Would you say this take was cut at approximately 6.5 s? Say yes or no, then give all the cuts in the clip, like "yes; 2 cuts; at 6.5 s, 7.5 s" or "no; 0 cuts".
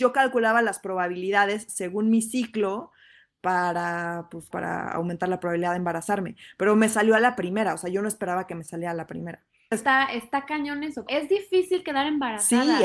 no; 3 cuts; at 4.5 s, 9.7 s, 11.1 s